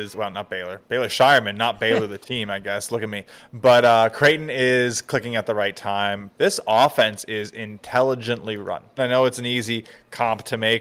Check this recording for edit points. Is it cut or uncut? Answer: cut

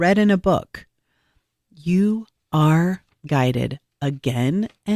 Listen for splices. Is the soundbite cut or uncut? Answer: uncut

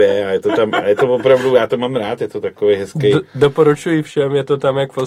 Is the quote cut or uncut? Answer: uncut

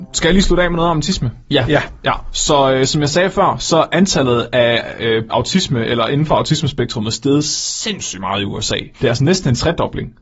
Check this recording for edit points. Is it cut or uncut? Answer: cut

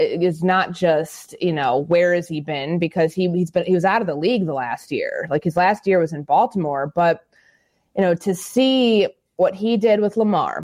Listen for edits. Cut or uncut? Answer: uncut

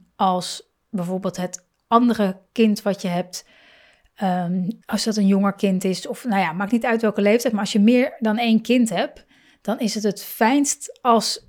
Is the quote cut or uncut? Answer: cut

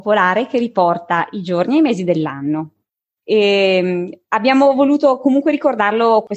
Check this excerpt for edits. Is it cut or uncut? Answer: cut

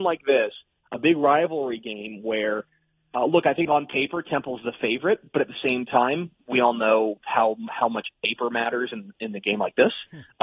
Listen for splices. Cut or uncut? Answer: uncut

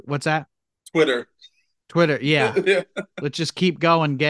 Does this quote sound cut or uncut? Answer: uncut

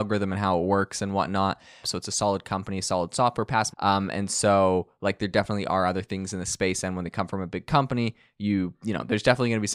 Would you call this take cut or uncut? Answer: cut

